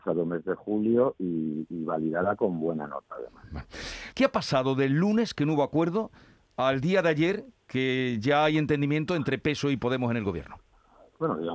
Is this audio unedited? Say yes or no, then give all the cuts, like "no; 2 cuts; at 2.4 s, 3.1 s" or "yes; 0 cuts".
no; 1 cut; at 4.1 s